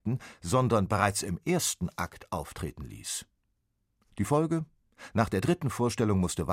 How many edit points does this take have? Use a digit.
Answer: 0